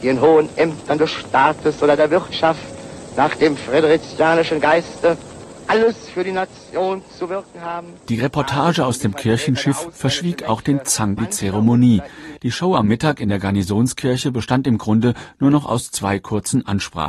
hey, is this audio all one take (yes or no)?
no